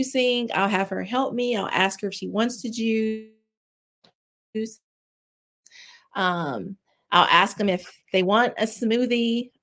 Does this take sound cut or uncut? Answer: uncut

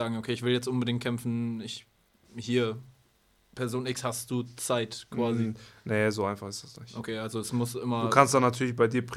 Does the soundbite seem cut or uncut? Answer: uncut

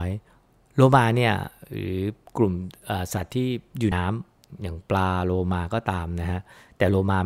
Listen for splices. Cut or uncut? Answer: cut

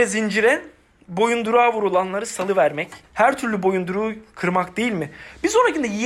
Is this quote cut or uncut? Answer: cut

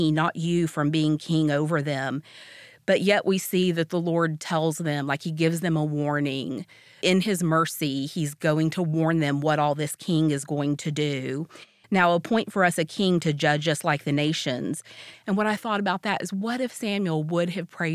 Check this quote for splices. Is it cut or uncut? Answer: cut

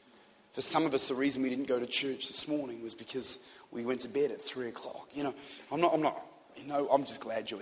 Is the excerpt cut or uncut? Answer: uncut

